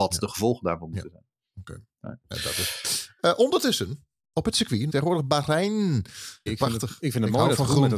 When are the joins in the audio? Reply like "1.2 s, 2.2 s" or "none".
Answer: 4.9 s, 6.5 s